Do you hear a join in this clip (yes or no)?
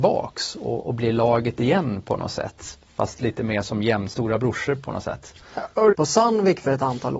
yes